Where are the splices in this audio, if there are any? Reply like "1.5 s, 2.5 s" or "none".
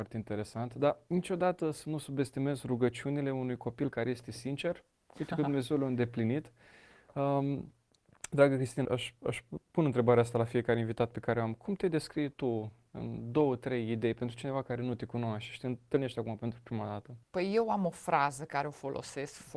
8.8 s, 17.2 s